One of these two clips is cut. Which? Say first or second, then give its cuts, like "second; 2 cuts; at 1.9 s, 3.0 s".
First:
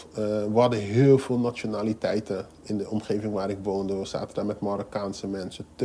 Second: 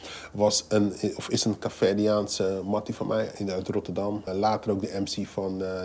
second; 1 cut; at 4.3 s